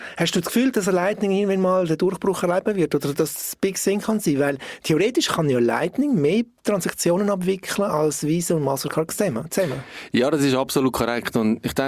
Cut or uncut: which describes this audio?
uncut